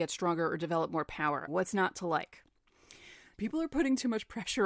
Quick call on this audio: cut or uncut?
cut